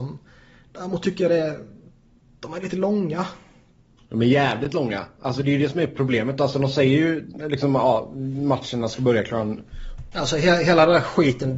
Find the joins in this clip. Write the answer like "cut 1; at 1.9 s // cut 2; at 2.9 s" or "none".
cut 1; at 10.1 s